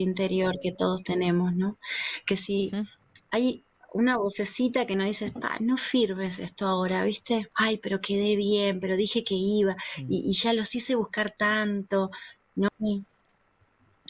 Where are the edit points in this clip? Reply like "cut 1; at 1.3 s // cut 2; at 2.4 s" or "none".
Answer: cut 1; at 7.5 s // cut 2; at 12.7 s